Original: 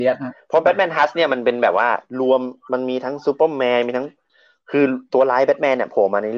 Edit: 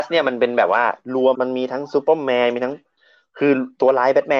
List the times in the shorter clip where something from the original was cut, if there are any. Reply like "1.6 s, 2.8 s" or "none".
1.3 s